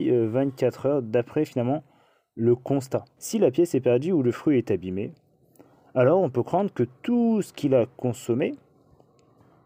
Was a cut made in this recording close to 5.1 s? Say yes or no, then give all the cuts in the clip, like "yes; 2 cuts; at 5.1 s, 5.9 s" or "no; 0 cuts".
no; 1 cut; at 3.2 s